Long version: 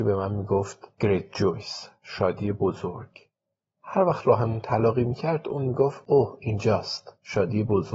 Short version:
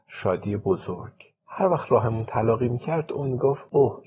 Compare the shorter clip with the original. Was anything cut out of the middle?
yes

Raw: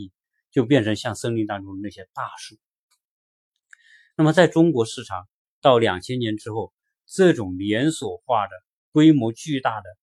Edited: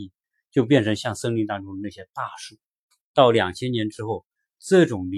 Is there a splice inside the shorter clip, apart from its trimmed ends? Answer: yes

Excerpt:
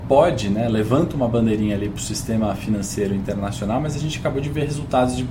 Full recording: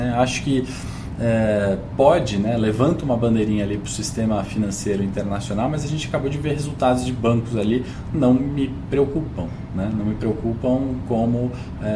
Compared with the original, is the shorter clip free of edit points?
yes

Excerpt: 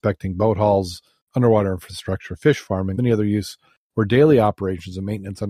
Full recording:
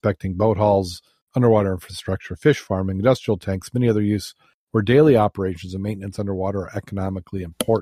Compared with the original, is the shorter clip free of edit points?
no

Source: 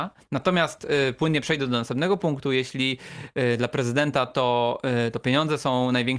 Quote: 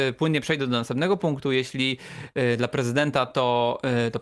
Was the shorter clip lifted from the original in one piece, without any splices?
yes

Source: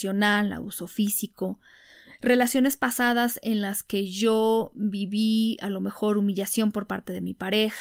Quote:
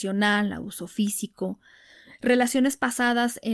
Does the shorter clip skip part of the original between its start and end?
no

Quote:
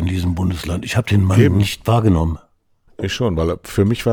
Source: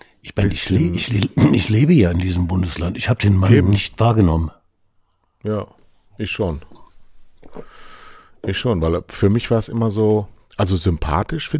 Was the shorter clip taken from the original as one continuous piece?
no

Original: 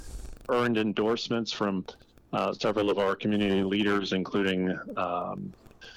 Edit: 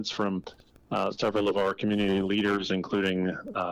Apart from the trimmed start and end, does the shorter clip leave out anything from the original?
no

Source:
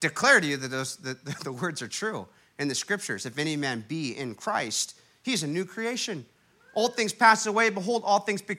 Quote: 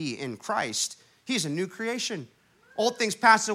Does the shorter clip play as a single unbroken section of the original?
yes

